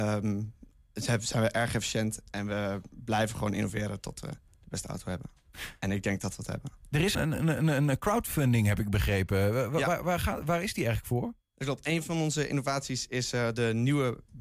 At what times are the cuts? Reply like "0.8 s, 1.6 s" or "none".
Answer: 7.1 s